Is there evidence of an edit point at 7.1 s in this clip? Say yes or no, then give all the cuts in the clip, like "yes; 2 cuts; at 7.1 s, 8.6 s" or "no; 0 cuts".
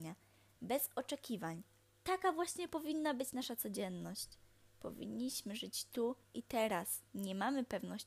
yes; 1 cut; at 7.1 s